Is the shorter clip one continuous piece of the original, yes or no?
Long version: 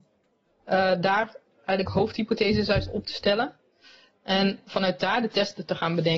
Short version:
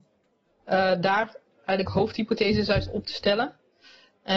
yes